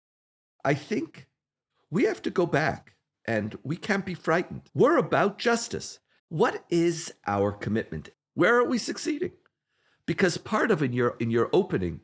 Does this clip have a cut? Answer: yes; 2 cuts; at 6.2 s, 8.1 s

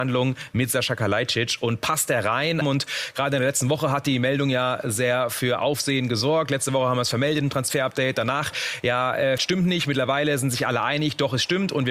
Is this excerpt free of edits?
no; 2 cuts; at 2.6 s, 9.4 s

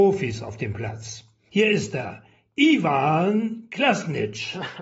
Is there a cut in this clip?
yes; 1 cut; at 1.5 s

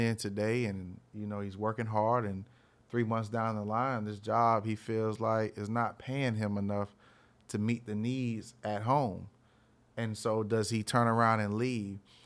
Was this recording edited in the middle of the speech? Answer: no; 0 cuts

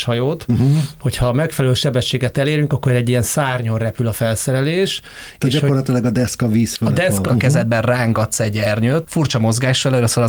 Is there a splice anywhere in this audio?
yes; 2 cuts; at 7.3 s, 9.0 s

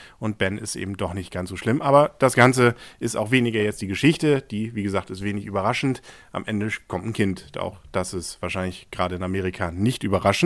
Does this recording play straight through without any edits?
yes; 0 cuts

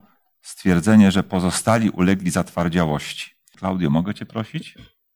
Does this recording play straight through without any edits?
no; 1 cut; at 3.5 s

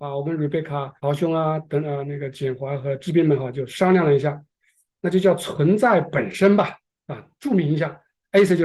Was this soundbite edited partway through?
yes; 1 cut; at 1.0 s

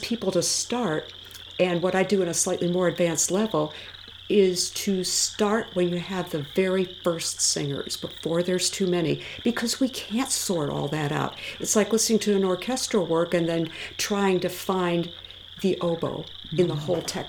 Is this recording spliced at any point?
no; 0 cuts

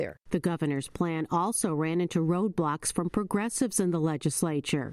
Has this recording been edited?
no; 0 cuts

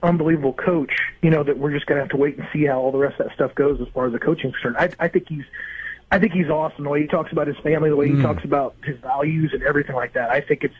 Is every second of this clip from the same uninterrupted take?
yes; 0 cuts

